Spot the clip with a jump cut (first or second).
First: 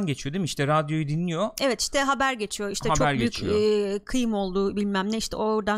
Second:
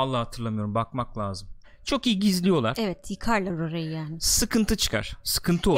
second